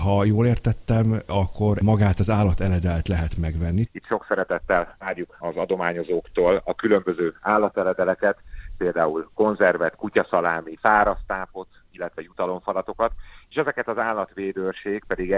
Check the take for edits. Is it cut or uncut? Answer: cut